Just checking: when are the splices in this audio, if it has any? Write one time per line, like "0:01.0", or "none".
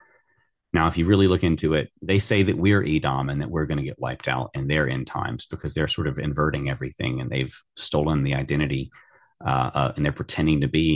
0:01.9